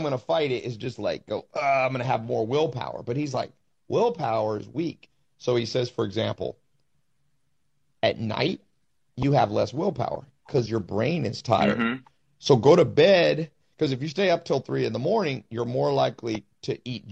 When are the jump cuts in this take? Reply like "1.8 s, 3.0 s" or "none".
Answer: none